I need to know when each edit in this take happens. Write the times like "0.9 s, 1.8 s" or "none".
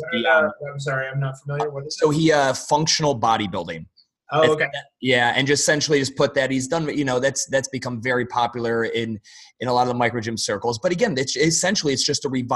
none